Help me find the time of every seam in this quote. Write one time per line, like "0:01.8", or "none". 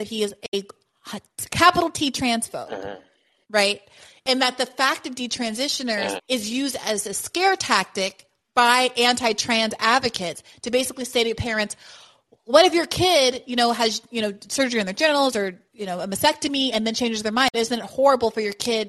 0:03.4
0:06.2